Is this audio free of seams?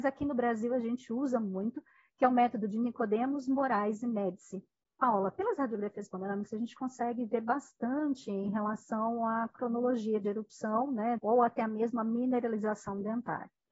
no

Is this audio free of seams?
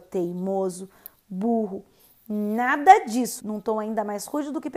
no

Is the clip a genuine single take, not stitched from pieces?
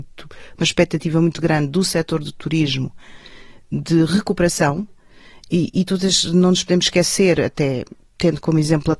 yes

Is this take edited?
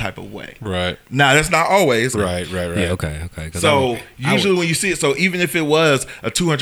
yes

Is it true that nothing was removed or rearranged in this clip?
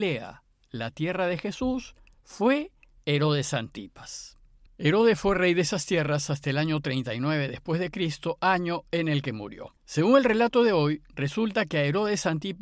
no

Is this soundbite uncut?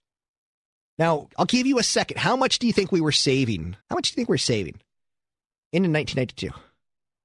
no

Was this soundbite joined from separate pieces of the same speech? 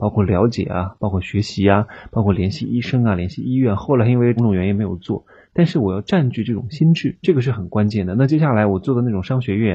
yes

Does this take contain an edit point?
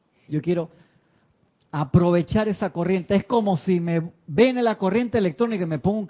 no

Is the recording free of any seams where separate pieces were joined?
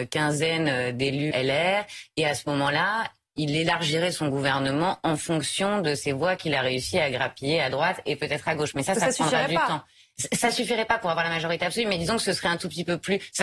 no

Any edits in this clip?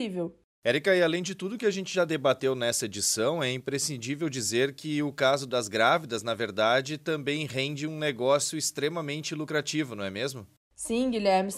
no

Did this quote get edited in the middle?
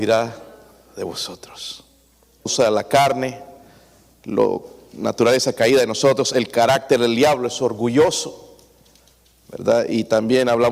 yes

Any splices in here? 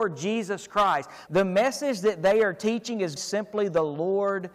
yes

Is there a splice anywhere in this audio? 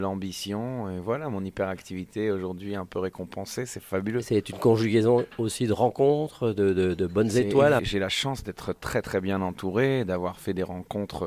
yes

